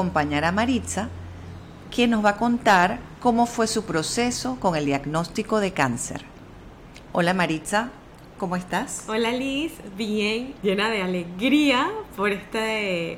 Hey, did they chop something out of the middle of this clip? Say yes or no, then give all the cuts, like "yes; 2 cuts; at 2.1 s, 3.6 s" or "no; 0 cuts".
yes; 1 cut; at 10.6 s